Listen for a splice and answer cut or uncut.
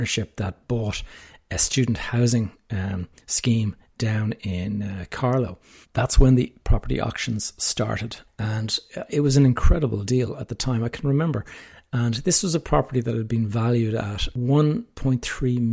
cut